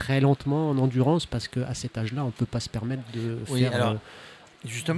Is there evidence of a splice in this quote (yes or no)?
no